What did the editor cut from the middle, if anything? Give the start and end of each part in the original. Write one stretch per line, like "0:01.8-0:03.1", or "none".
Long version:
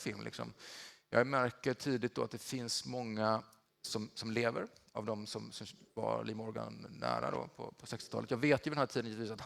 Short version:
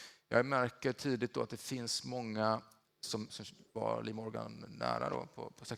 0:04.1-0:05.5